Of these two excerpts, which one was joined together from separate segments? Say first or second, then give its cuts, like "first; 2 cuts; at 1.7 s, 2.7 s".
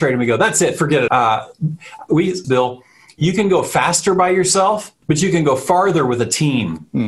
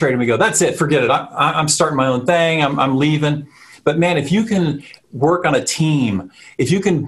first; 3 cuts; at 1.1 s, 2.4 s, 5.0 s